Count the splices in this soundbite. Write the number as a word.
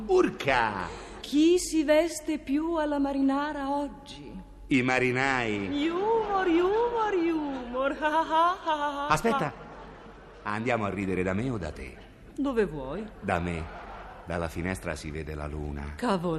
one